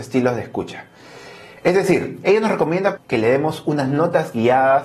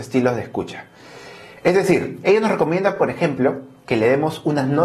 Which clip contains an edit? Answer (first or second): first